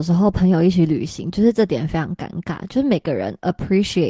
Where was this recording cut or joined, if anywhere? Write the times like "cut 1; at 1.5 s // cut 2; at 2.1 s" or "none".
none

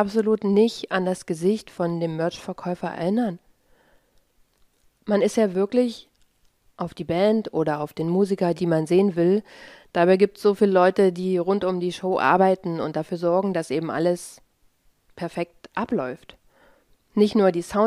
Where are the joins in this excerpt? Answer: cut 1; at 8.5 s

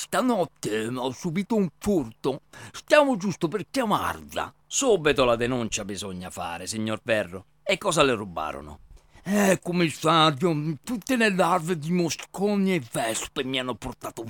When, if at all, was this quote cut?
none

